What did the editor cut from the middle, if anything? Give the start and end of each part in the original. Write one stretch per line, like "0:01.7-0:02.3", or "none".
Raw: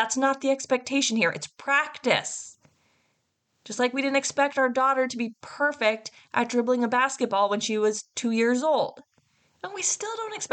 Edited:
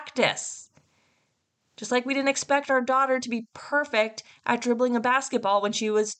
none